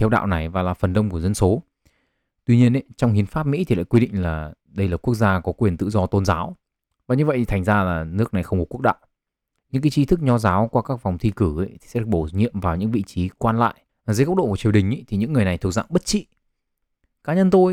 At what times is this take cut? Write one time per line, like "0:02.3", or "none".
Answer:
0:09.6
0:13.9